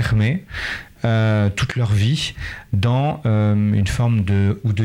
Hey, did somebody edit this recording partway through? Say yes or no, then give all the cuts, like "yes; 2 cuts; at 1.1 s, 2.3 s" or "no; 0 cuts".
no; 0 cuts